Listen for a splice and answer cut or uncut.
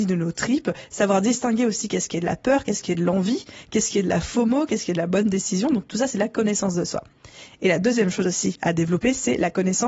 uncut